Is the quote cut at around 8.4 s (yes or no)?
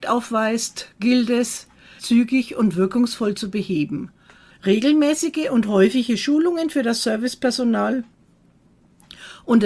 no